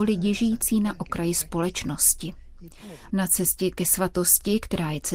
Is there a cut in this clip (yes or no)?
yes